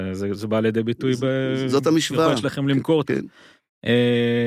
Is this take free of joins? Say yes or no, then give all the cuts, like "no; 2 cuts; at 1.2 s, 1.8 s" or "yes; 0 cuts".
no; 1 cut; at 3.1 s